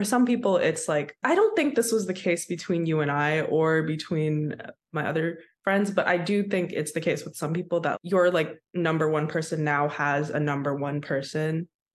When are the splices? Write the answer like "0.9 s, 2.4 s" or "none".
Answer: 1.2 s, 7.9 s